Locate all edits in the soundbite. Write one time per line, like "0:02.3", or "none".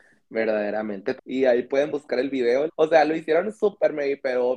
0:01.2
0:02.7